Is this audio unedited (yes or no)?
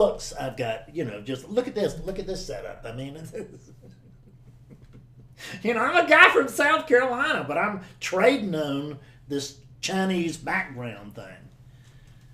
yes